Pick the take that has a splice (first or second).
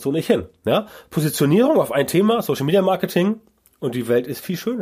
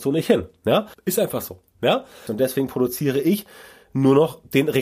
second